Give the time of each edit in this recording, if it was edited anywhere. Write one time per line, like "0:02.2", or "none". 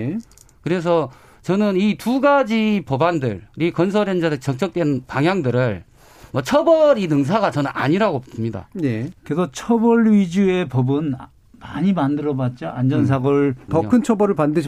0:03.5
0:09.1
0:13.7